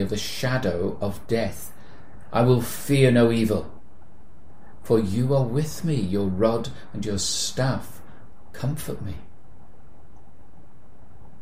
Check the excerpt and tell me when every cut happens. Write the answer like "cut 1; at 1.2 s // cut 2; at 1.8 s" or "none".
none